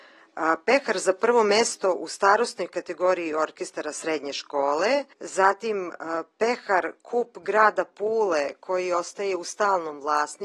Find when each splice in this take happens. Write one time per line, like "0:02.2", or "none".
0:05.1